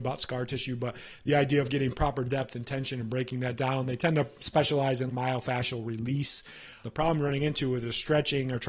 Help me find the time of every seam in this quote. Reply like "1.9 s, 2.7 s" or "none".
5.1 s, 6.8 s